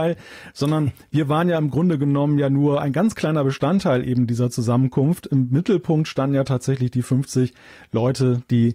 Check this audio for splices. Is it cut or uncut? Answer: uncut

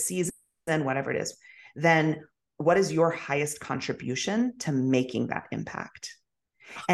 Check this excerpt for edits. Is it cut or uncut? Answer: uncut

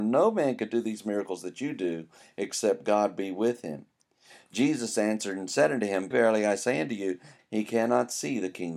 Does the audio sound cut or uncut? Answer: cut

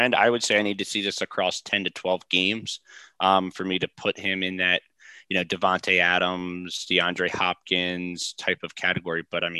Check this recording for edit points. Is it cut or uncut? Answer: uncut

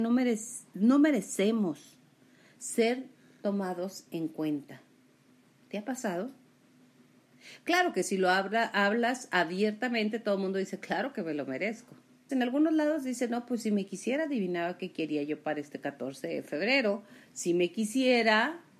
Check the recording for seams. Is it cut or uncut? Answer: cut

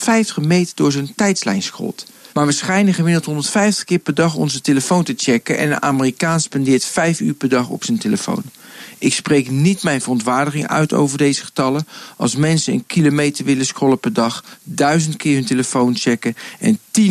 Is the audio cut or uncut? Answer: cut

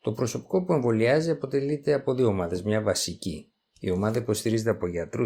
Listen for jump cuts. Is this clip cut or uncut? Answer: cut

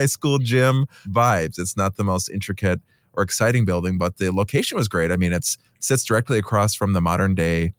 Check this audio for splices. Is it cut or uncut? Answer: uncut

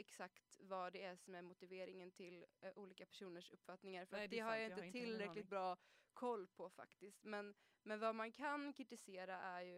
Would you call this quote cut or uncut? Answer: uncut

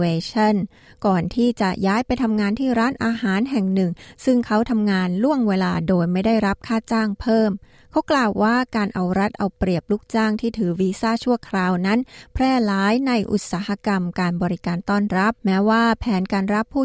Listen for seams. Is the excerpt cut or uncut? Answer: cut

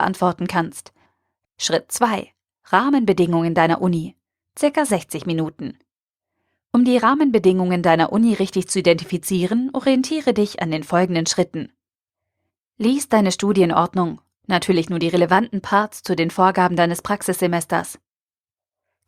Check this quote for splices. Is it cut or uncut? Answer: cut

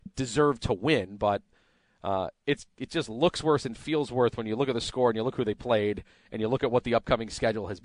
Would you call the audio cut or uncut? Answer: uncut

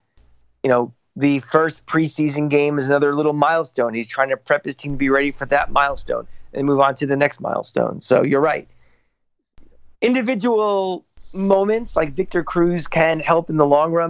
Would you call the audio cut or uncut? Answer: cut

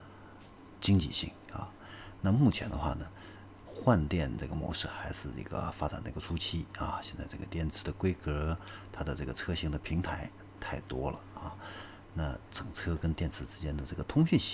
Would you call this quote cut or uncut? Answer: uncut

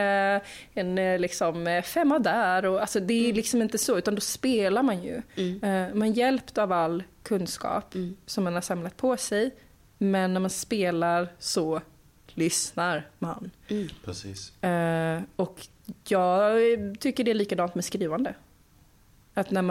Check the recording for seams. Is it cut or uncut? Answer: uncut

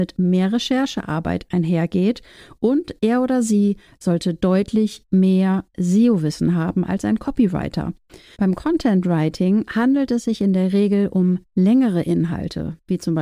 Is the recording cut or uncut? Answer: cut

